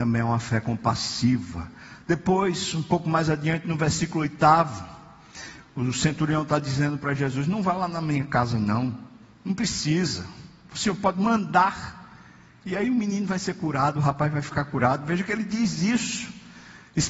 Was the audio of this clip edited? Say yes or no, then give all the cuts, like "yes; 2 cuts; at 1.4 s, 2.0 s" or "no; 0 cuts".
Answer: no; 0 cuts